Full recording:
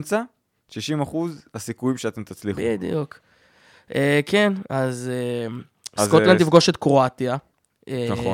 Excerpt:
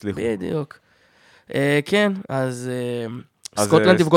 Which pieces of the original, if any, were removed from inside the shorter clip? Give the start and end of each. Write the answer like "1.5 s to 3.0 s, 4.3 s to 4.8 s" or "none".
none